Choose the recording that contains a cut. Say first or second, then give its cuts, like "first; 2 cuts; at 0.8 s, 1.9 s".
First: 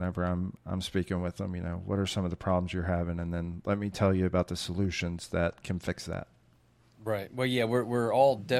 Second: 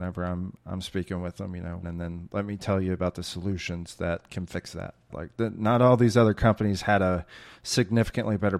second; 2 cuts; at 1.8 s, 5.1 s